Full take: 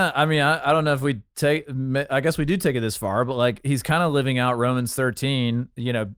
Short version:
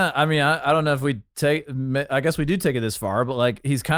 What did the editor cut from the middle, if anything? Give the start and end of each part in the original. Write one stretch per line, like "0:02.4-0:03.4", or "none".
none